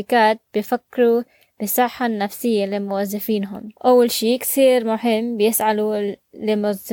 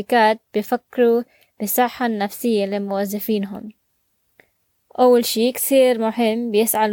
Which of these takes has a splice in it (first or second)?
first